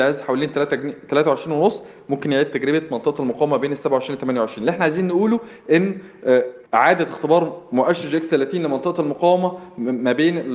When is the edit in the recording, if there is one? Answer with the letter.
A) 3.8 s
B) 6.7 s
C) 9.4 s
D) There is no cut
B